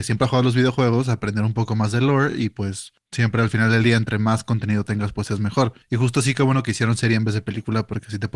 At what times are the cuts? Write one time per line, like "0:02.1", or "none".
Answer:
none

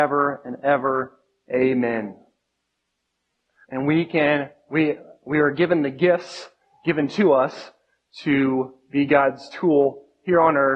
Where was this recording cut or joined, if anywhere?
0:03.6

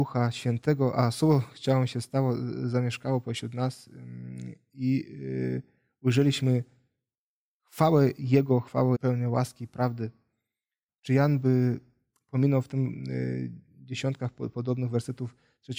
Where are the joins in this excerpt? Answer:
0:08.9
0:10.9

